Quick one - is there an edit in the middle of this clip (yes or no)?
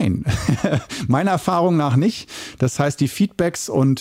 no